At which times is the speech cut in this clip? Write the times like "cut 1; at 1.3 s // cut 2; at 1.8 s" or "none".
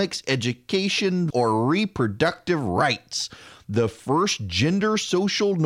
cut 1; at 1.3 s